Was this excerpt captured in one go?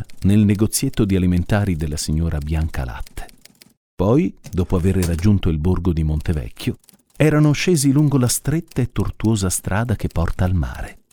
yes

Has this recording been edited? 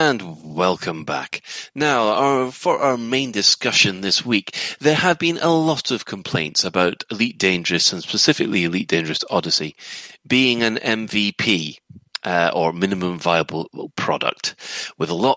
no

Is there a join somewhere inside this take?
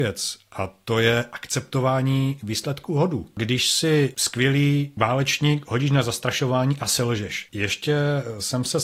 yes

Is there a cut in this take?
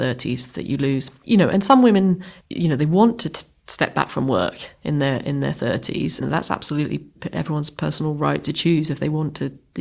yes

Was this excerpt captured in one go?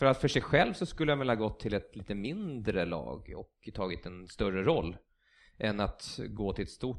yes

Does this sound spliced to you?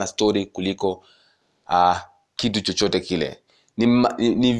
no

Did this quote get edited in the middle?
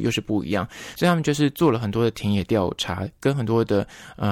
no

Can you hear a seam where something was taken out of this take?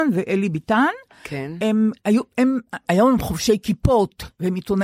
yes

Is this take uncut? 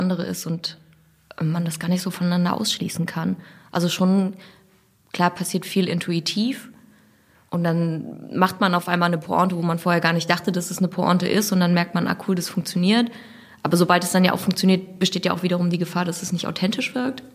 yes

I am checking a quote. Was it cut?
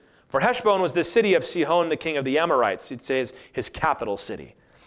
no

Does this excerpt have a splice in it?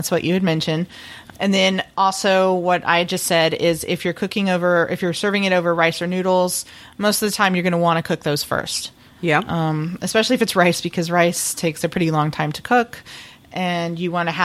no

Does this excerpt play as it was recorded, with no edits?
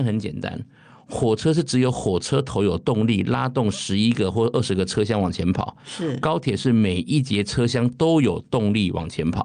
yes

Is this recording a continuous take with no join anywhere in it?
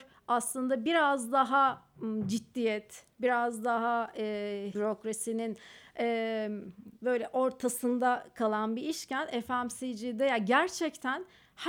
no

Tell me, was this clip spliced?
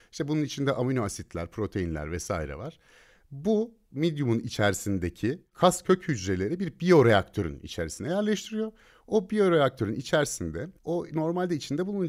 yes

